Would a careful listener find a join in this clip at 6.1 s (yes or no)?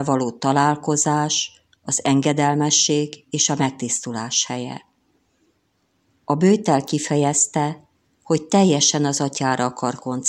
yes